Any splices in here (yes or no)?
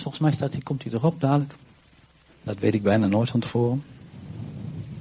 yes